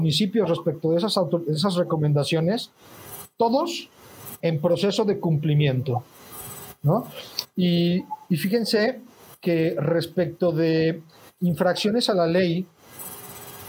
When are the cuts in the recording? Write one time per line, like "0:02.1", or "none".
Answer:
0:04.4
0:07.5